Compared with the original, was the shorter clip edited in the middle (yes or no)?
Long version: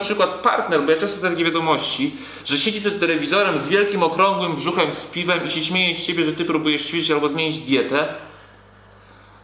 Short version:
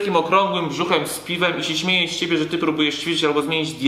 no